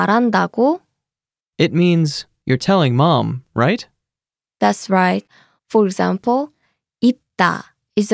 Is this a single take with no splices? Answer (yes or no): no